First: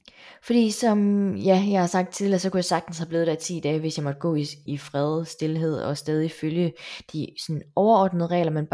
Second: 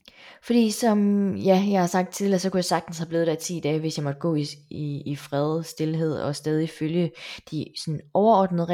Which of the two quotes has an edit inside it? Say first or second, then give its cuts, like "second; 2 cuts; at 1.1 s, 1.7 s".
first; 1 cut; at 4.7 s